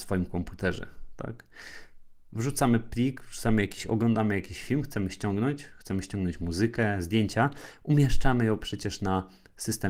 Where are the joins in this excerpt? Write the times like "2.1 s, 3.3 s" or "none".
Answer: none